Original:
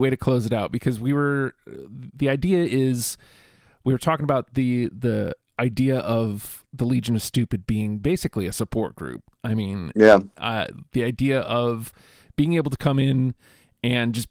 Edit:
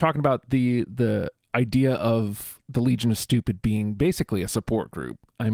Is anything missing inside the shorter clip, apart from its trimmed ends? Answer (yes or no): no